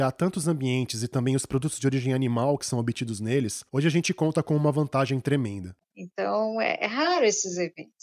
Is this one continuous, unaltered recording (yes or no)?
no